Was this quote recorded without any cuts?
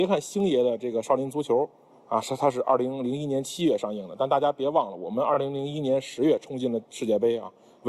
yes; 0 cuts

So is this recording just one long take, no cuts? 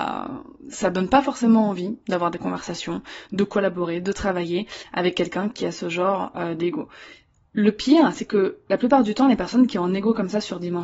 yes; 0 cuts

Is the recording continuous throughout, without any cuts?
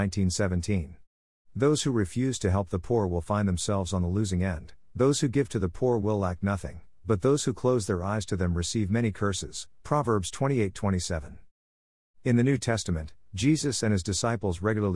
yes; 0 cuts

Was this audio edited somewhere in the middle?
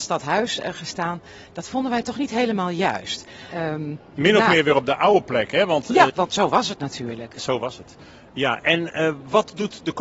yes; 2 cuts; at 3.5 s, 6.1 s

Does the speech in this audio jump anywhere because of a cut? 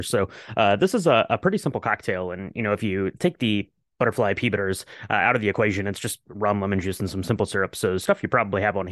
no; 0 cuts

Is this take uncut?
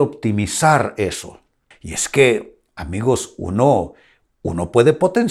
no; 1 cut; at 1.7 s

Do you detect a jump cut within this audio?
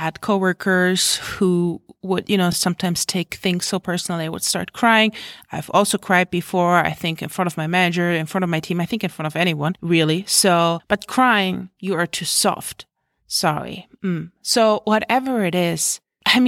no; 0 cuts

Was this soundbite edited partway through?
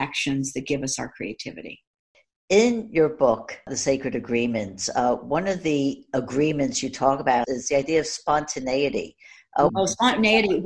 yes; 2 cuts; at 7.4 s, 9.7 s

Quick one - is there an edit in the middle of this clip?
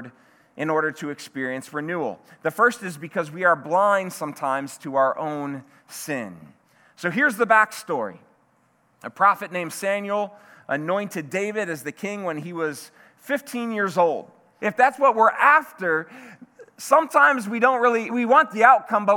yes; 2 cuts; at 14.6 s, 18.1 s

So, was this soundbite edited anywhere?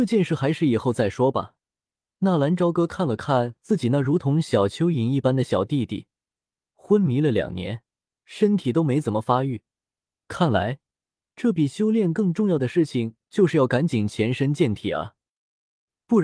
no; 0 cuts

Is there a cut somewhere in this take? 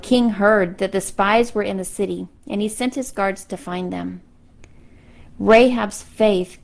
no; 0 cuts

